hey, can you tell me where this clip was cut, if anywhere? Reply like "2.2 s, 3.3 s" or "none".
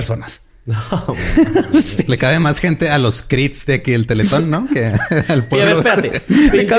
none